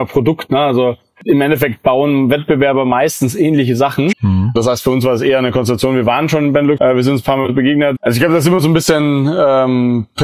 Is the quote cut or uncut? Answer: cut